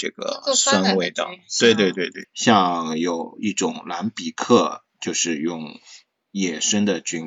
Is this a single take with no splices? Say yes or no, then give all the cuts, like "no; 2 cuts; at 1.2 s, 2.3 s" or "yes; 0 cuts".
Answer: no; 2 cuts; at 2.2 s, 4.9 s